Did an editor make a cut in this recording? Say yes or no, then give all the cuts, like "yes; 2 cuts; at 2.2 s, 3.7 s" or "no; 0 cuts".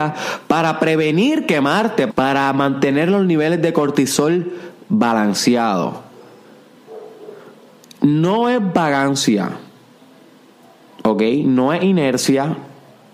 yes; 1 cut; at 2.1 s